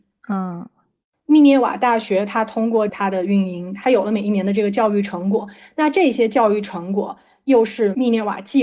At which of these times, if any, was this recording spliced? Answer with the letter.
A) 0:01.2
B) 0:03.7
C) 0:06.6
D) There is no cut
D